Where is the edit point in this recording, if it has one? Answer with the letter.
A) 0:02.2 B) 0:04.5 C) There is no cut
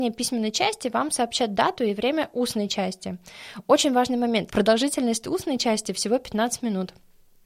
B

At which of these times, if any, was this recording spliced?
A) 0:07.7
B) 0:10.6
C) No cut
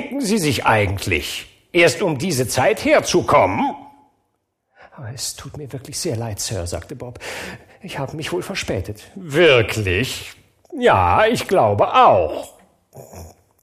C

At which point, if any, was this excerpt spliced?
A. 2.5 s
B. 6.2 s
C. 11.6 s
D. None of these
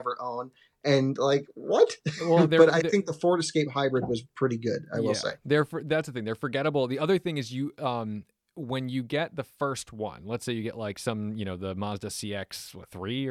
D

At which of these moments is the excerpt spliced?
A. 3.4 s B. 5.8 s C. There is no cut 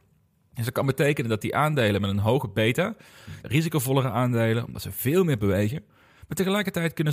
A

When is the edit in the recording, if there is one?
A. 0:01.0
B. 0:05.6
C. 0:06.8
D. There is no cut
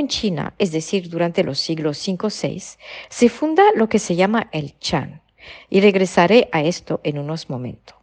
B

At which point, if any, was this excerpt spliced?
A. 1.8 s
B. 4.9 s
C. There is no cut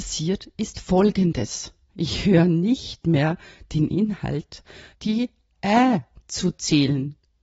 B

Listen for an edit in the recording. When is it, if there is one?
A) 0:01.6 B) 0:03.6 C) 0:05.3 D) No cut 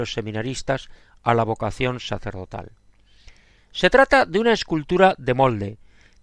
B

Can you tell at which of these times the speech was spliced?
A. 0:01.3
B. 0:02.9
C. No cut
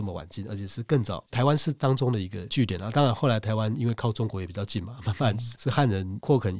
A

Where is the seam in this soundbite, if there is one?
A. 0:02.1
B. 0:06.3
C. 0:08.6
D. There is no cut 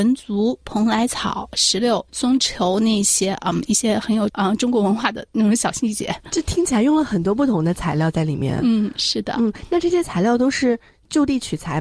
A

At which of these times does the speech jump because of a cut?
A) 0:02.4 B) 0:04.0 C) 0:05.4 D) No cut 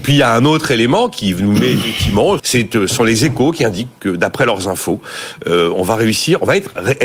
A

